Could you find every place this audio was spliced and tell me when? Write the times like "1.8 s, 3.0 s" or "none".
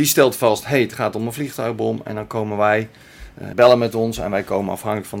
3.5 s